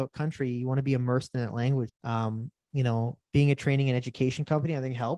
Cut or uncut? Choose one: cut